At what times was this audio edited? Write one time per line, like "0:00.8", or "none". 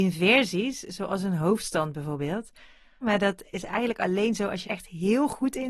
0:03.0
0:04.6